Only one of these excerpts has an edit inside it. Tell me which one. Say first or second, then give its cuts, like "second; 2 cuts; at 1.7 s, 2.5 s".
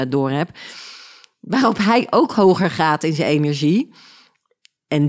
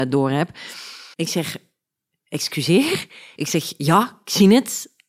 second; 2 cuts; at 1.1 s, 3.4 s